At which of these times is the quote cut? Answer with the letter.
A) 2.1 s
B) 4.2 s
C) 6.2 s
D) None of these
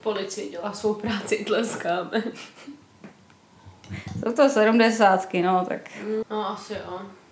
C